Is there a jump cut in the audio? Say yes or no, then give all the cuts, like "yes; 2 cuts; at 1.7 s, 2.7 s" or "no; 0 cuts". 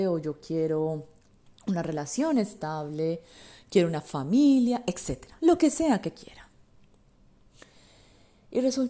no; 0 cuts